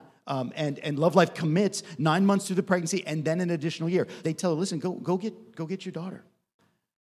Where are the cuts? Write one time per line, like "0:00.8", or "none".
0:04.2